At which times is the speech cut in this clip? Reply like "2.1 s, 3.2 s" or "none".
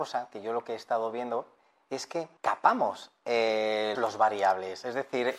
2.4 s, 4.0 s